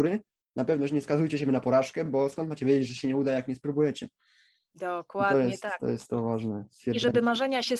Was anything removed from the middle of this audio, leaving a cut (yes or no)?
no